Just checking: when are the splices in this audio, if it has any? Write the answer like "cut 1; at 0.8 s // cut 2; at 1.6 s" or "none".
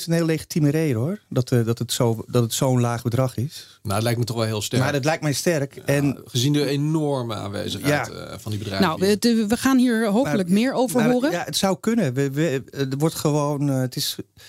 none